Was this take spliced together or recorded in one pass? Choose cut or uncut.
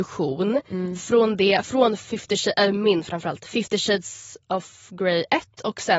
uncut